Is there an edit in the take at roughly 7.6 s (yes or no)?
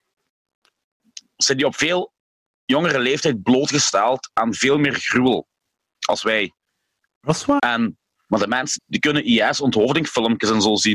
yes